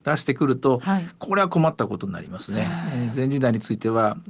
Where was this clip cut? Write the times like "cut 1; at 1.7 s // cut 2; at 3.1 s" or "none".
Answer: none